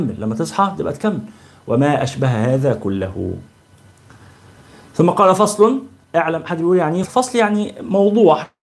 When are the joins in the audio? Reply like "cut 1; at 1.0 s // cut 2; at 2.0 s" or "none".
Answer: cut 1; at 7.0 s